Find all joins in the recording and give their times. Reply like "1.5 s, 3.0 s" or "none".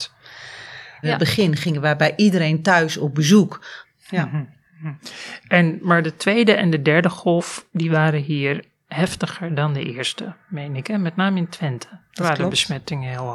1.0 s, 3.8 s